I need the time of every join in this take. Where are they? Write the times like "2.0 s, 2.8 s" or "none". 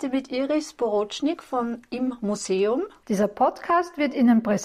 3.0 s